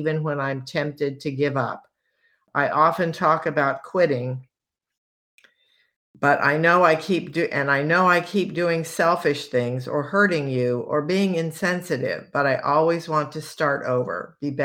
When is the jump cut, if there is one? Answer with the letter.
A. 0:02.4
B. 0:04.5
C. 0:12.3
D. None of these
D